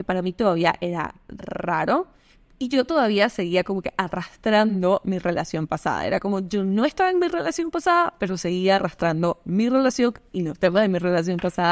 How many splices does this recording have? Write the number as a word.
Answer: zero